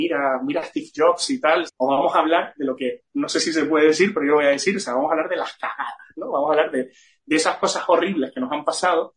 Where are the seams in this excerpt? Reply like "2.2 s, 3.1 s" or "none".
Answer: 1.7 s